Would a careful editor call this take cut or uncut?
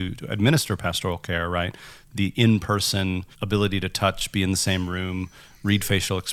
cut